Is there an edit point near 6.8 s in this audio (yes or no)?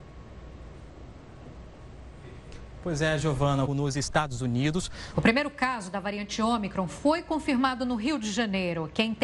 no